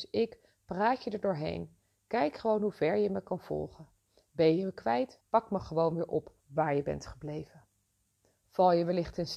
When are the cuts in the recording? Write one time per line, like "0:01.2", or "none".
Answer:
0:05.2
0:06.4